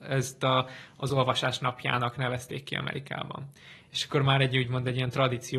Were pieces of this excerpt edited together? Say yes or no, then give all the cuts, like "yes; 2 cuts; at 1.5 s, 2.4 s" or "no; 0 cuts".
no; 0 cuts